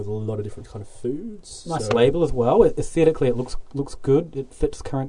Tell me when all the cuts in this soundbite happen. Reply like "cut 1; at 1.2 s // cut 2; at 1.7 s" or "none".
none

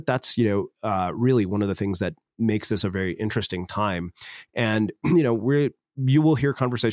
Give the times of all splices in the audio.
none

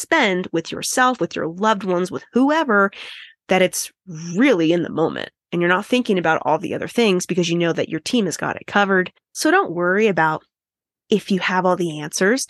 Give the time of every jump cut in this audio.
none

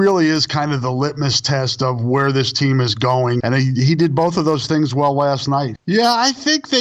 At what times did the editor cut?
cut 1; at 3.4 s // cut 2; at 5.8 s

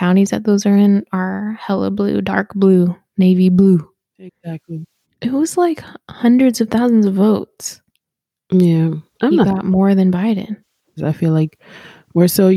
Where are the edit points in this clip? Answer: cut 1; at 5.0 s // cut 2; at 11.0 s

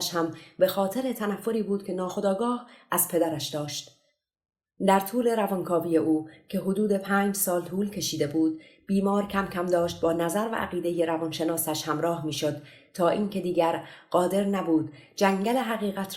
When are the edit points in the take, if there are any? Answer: none

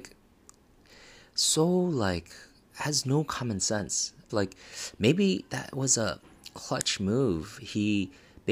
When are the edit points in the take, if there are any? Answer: cut 1; at 4.3 s

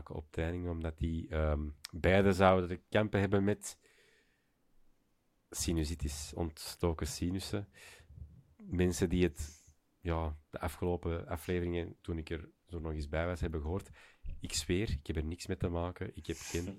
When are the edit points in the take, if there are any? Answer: none

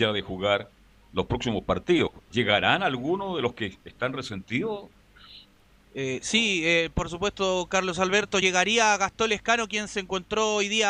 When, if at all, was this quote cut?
none

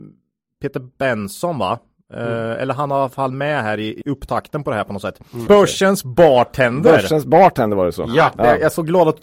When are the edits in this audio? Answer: cut 1; at 4.0 s // cut 2; at 5.5 s

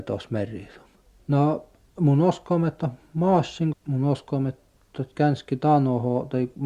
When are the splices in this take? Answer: cut 1; at 1.2 s // cut 2; at 3.7 s

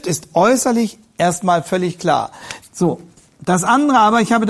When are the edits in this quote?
cut 1; at 2.6 s

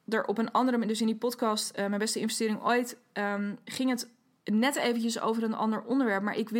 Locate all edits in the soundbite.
none

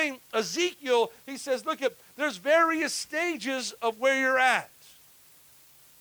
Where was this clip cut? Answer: none

